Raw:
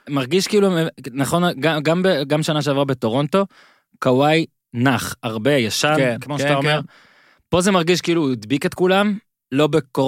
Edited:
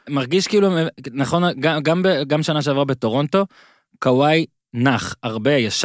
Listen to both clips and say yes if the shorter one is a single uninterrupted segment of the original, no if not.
yes